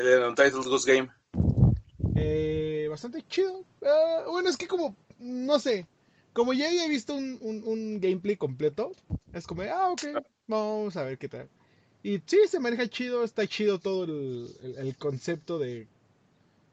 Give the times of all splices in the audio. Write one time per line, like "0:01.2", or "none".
none